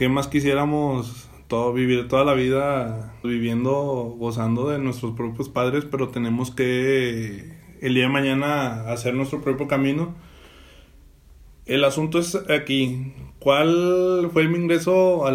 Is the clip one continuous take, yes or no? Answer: no